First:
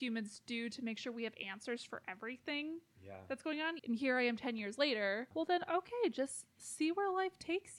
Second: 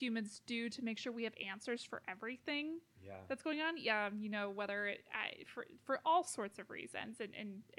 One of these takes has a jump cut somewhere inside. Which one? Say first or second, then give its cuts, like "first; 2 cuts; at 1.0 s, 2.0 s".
first; 2 cuts; at 3.8 s, 5.3 s